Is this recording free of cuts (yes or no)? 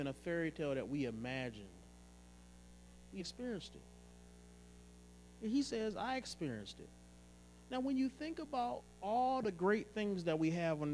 no